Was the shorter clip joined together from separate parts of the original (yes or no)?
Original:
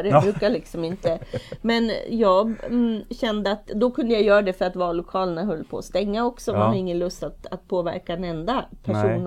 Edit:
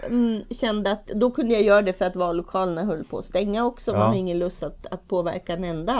no